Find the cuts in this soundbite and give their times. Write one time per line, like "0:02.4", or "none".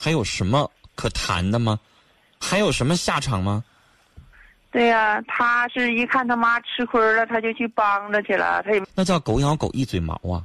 0:08.8